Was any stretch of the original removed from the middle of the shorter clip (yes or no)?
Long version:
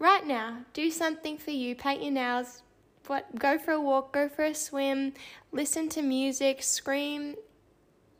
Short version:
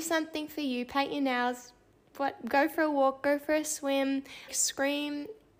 yes